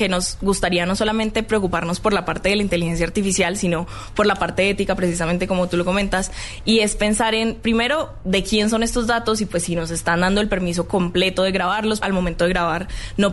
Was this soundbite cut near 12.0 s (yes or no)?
yes